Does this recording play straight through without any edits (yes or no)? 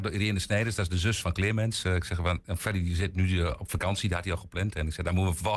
no